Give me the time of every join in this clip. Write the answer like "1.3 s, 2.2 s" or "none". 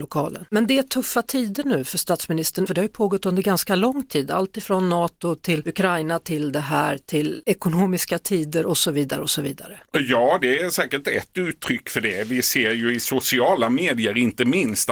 2.7 s